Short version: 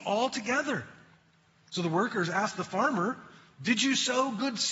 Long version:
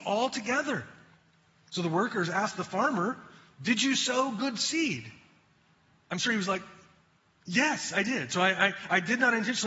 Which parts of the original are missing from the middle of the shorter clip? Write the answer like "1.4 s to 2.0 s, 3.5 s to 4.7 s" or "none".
none